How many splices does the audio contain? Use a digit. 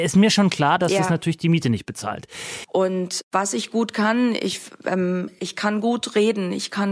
1